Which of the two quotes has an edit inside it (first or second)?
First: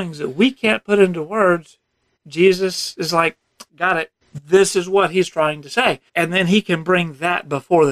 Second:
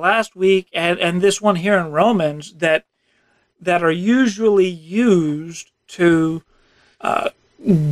first